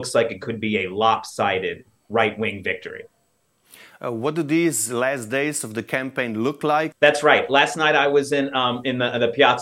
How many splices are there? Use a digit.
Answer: 1